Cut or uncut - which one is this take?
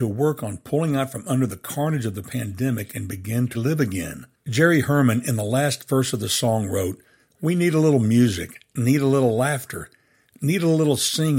cut